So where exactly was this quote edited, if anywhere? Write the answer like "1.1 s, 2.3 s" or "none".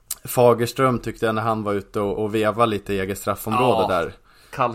2.2 s